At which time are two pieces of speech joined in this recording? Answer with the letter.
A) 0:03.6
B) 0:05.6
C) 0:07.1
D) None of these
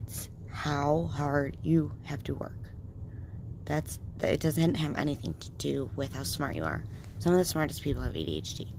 D